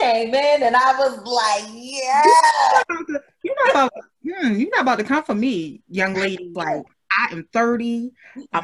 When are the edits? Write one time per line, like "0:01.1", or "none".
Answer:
0:06.5